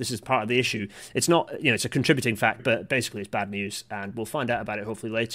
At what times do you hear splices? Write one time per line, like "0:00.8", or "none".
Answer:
0:02.6